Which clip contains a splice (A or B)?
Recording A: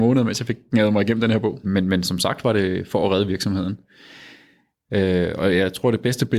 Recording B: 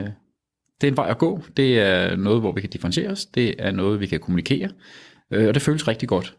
A